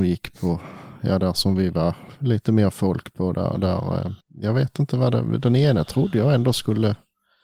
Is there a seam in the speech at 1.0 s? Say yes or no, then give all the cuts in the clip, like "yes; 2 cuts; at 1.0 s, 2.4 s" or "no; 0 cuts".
no; 1 cut; at 4.2 s